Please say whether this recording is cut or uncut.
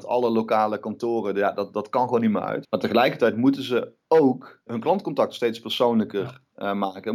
cut